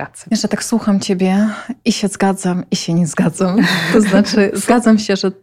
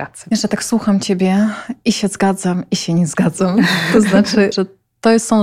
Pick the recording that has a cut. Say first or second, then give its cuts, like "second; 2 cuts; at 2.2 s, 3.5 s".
second; 1 cut; at 4.5 s